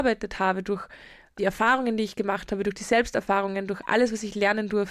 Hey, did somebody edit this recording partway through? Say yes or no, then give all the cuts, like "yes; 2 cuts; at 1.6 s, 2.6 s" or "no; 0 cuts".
no; 0 cuts